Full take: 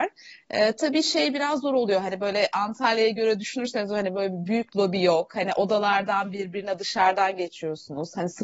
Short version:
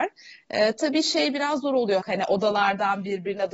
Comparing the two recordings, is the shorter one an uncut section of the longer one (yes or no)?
no